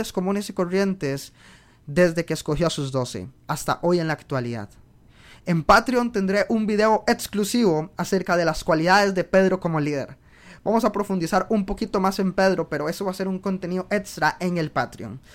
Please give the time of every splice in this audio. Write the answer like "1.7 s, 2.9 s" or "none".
none